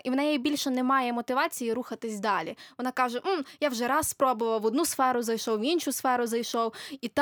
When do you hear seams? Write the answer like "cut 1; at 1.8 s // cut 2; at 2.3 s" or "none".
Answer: none